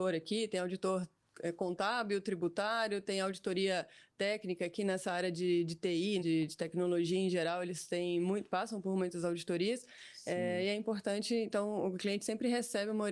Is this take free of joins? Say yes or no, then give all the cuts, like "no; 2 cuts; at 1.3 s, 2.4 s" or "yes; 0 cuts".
no; 1 cut; at 6.2 s